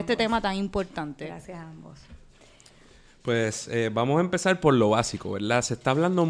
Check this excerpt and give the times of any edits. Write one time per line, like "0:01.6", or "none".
none